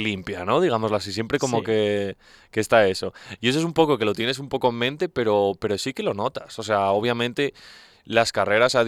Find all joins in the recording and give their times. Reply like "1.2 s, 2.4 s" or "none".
none